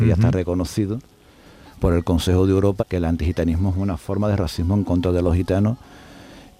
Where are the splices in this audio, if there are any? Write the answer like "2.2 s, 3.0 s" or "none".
2.8 s